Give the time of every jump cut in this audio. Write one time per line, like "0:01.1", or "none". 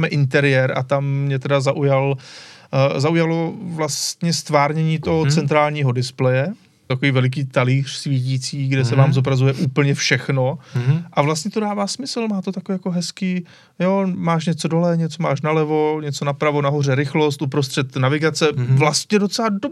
0:06.9

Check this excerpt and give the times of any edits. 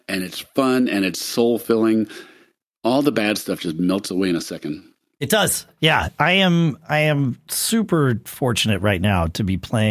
none

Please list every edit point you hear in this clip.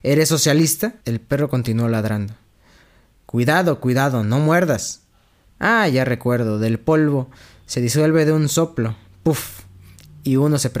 0:01.0
0:05.5

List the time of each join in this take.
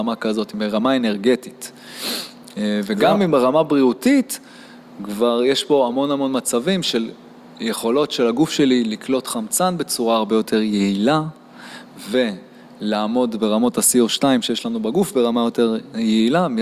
none

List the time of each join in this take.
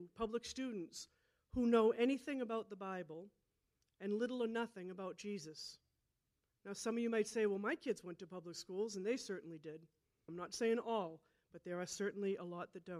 0:10.3

